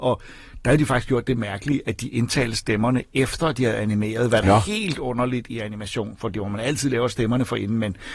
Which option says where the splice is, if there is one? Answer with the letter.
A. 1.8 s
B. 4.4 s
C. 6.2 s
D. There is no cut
B